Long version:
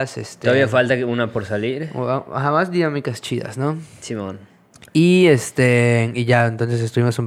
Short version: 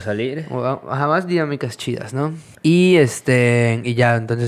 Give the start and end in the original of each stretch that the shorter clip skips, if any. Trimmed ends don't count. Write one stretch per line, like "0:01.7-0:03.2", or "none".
0:04.0-0:04.8

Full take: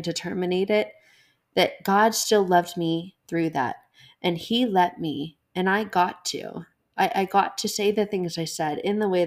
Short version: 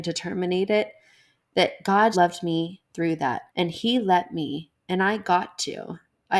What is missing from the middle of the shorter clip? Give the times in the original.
0:02.1-0:02.5
0:03.8-0:04.1

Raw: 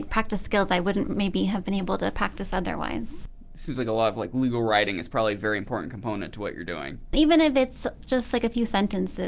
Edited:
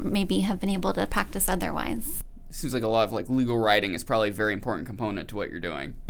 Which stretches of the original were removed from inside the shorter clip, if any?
none

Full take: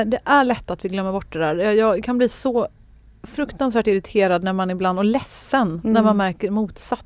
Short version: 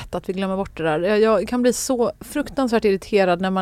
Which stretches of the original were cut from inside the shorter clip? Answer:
0:02.7-0:03.2

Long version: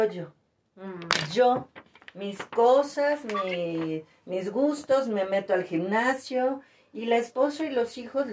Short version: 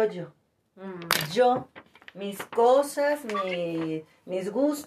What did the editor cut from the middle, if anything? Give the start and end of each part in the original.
none

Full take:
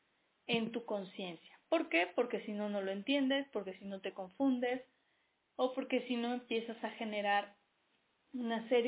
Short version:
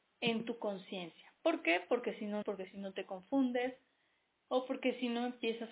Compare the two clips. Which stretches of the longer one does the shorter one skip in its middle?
0:02.7-0:03.5

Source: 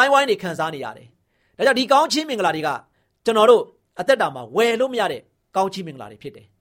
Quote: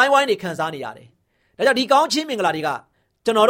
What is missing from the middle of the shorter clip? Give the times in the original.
none

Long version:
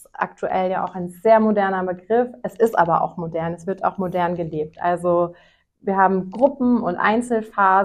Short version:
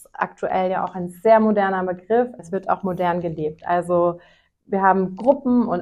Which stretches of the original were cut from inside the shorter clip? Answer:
0:02.4-0:03.5

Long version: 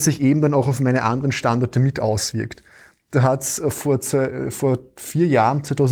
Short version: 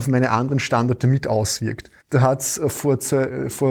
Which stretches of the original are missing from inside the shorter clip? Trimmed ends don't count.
0:02.7-0:03.0

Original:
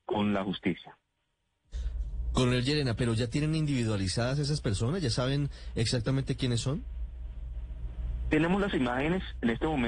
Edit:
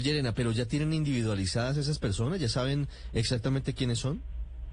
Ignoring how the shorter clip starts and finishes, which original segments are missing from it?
none

